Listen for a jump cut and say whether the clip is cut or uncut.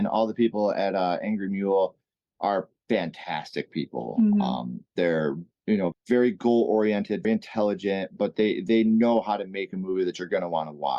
cut